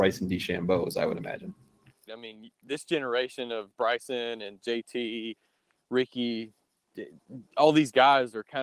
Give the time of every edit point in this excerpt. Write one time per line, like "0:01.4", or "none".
0:02.1